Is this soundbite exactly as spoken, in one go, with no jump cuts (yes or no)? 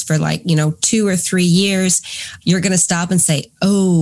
no